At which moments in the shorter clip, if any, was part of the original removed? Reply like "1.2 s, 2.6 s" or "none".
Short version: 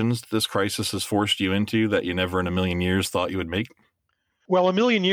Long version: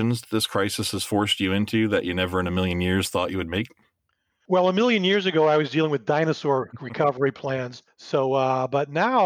none

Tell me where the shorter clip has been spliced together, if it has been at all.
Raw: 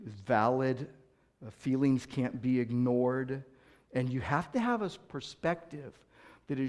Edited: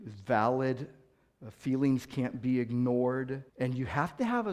3.5 s

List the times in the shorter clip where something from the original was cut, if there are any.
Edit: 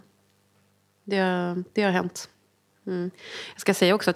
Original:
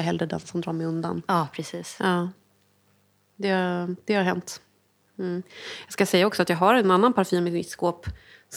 none

